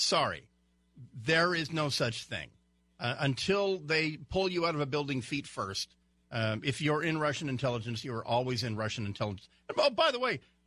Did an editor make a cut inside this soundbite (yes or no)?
no